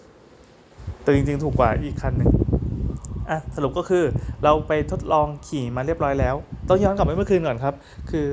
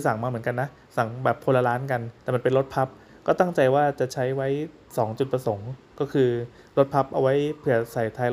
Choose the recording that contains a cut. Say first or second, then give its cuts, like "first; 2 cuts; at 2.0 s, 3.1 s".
second; 1 cut; at 2.2 s